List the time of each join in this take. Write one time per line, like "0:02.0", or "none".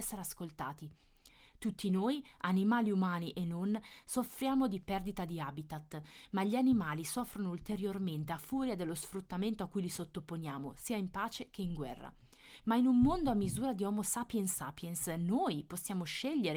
none